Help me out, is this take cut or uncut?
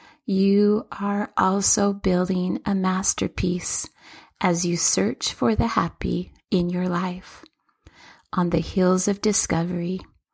uncut